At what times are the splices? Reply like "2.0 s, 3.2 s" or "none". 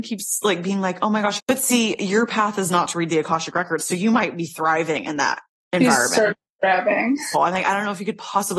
1.4 s, 7.3 s